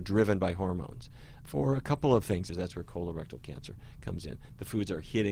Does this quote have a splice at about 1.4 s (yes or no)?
yes